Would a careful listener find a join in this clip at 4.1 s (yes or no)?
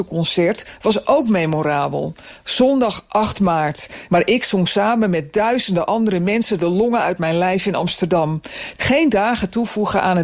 yes